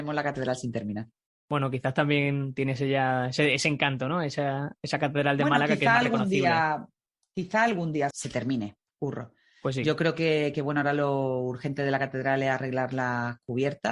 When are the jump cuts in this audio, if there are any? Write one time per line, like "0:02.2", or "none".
0:08.1